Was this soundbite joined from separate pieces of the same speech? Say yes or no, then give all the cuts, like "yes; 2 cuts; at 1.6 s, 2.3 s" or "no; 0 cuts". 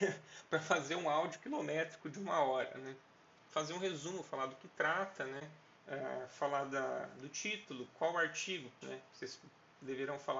yes; 3 cuts; at 3.4 s, 5.7 s, 8.8 s